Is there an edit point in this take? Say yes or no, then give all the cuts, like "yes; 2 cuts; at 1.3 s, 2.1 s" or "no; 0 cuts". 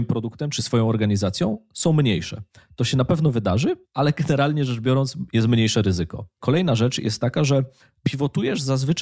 no; 0 cuts